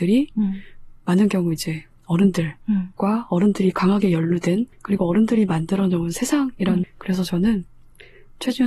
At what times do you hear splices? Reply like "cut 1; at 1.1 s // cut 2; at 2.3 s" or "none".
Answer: cut 1; at 4.7 s // cut 2; at 6.8 s